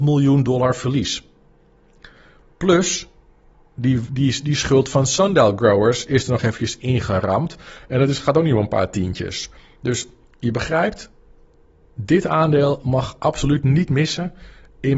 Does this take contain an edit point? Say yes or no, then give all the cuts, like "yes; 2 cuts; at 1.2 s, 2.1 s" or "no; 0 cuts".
no; 0 cuts